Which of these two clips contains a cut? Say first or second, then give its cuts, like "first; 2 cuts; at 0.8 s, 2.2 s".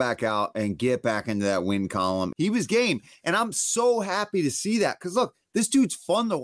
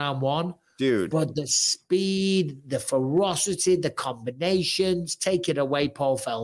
first; 1 cut; at 2.3 s